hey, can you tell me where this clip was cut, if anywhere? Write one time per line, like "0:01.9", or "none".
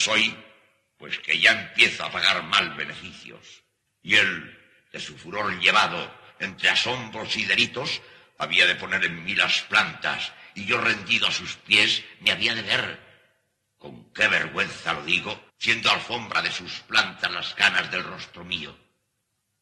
0:03.9
0:15.5